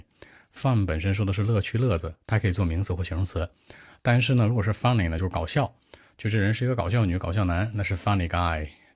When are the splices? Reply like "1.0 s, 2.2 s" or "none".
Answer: 5.2 s